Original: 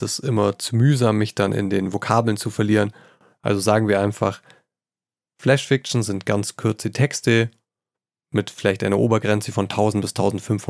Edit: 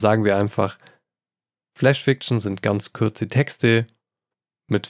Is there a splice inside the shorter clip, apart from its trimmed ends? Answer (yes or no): no